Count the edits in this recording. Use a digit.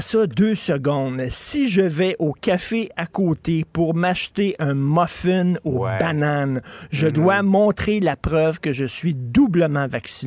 0